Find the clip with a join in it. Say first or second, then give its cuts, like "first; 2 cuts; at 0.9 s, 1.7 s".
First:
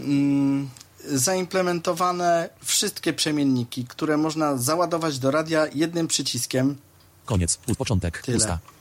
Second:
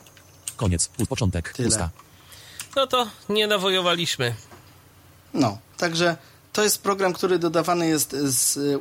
first; 1 cut; at 7.2 s